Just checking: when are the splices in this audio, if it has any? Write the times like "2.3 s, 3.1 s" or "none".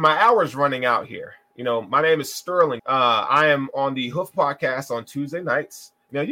2.8 s